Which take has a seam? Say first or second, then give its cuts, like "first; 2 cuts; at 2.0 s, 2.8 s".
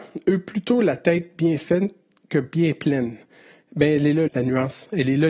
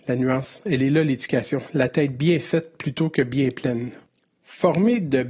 first; 1 cut; at 4.3 s